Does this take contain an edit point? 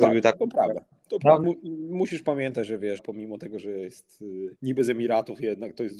yes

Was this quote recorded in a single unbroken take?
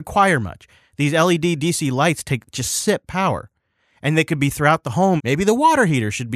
no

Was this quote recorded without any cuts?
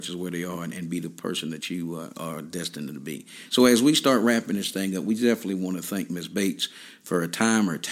yes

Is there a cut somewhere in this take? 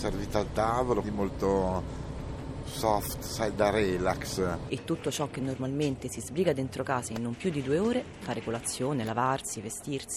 yes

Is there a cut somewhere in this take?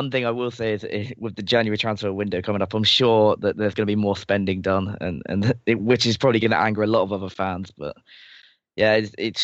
no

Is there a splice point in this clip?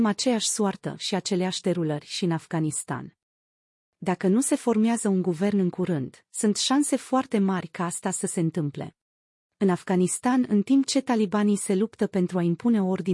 yes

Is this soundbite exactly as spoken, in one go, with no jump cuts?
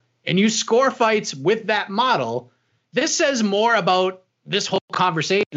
yes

